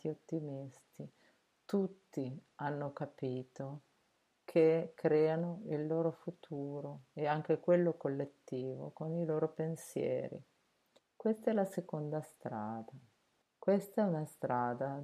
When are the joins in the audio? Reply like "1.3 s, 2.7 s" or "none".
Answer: 11.0 s, 13.4 s